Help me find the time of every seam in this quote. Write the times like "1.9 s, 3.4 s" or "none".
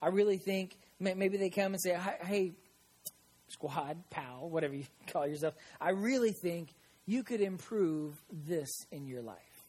none

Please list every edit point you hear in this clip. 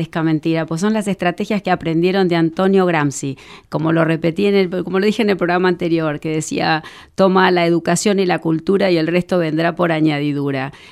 none

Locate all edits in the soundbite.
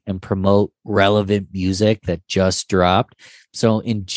none

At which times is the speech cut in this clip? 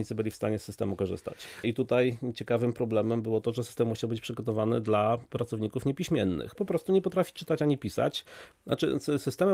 1.6 s, 6.6 s, 8.5 s

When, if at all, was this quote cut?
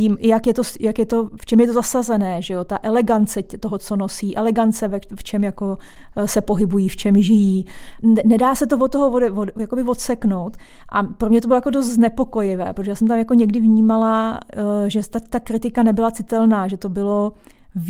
none

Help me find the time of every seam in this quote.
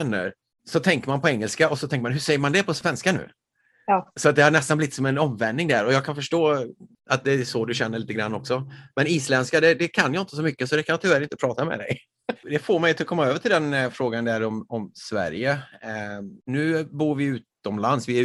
12.4 s

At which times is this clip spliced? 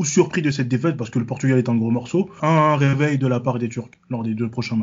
2.4 s

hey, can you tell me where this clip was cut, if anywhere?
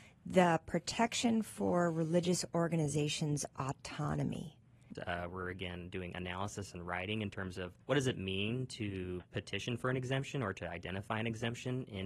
5.0 s, 7.8 s

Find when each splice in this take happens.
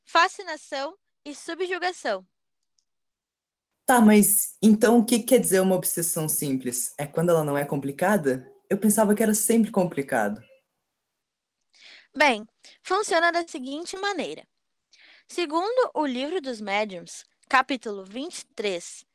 none

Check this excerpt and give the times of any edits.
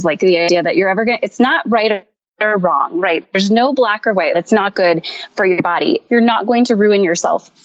4.3 s, 6.1 s

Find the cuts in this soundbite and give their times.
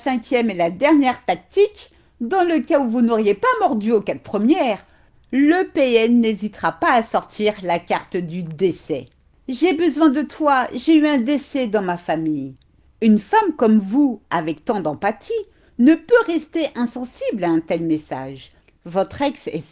none

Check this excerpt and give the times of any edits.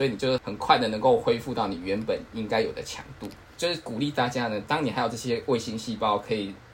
3.5 s, 4.6 s

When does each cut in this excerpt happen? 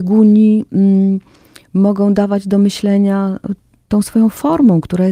none

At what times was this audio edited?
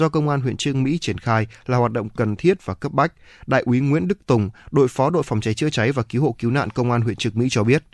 none

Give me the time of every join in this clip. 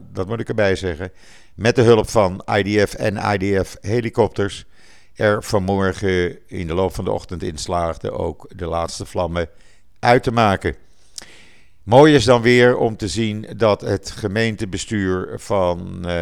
none

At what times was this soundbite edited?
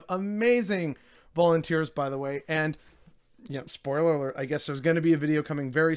none

